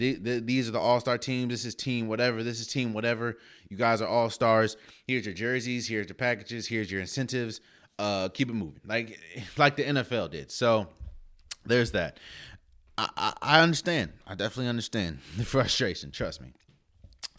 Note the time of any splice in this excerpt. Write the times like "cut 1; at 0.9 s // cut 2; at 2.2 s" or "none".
none